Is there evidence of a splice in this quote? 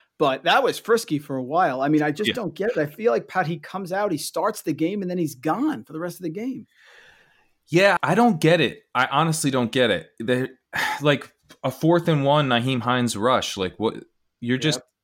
yes; 1 cut; at 8.0 s

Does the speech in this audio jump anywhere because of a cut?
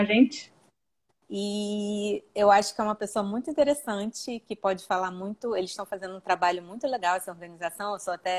yes; 1 cut; at 1.2 s

